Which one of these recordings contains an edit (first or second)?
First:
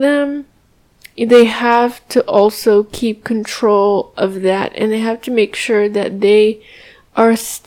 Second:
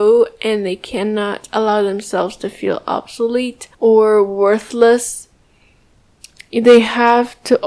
second